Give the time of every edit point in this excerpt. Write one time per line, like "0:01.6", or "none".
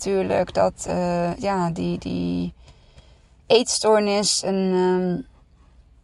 none